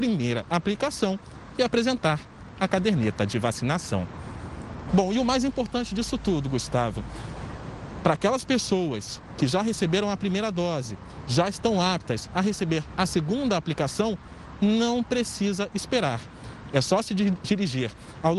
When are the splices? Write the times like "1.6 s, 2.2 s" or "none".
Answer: 4.9 s